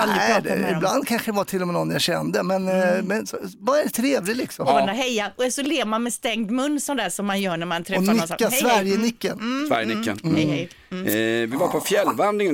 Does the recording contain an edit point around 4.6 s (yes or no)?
yes